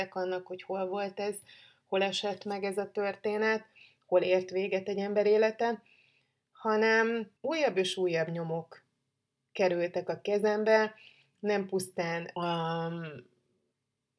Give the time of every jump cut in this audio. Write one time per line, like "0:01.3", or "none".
0:07.4
0:12.4